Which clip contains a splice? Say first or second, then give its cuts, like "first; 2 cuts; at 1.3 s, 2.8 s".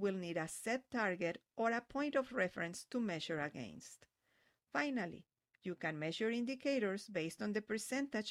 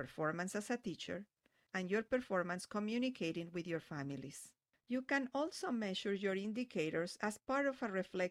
second; 2 cuts; at 1.7 s, 4.7 s